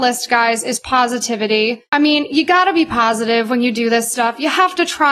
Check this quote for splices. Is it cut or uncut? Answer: cut